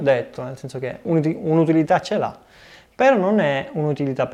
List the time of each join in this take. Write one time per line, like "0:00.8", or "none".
0:01.0